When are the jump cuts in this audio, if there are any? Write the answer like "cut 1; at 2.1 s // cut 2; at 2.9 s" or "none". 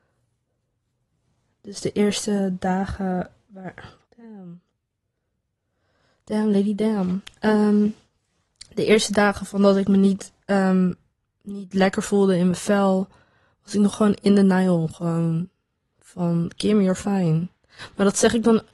cut 1; at 4.0 s